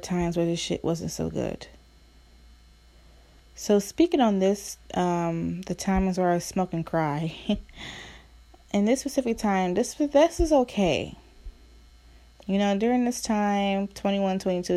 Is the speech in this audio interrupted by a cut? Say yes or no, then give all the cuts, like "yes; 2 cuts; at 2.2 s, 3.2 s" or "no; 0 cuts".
no; 0 cuts